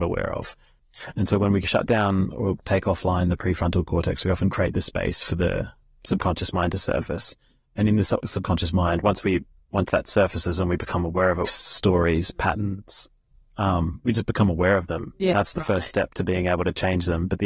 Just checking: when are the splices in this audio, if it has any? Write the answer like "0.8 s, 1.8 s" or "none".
11.5 s